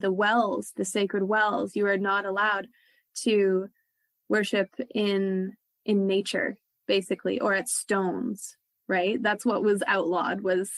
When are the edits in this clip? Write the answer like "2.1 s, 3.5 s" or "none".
none

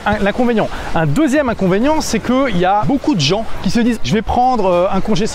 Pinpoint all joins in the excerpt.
2.8 s, 4.0 s

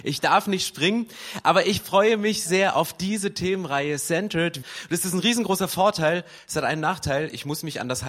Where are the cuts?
2.5 s, 4.6 s

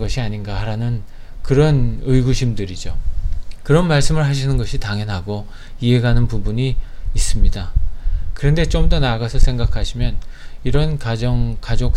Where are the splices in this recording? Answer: none

